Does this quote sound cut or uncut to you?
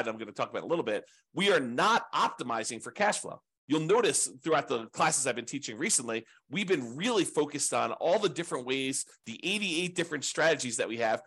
uncut